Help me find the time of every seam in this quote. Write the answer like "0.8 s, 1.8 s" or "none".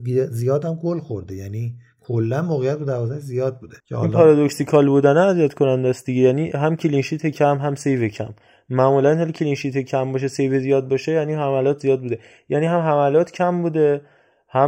3.8 s